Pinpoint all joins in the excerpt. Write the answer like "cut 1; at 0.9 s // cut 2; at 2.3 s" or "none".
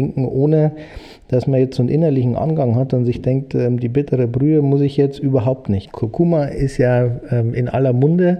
cut 1; at 5.8 s